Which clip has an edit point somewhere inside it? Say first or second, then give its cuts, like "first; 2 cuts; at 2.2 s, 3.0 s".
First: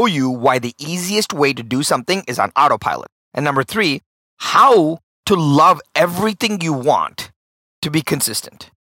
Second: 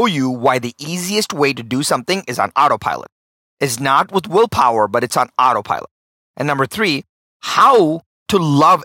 first; 1 cut; at 3.2 s